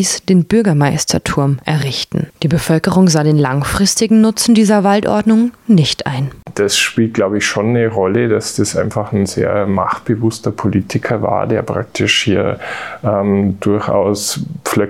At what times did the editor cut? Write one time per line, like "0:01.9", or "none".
0:02.3